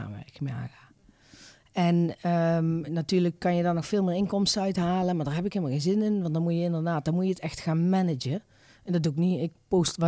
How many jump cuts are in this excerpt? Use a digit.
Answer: 1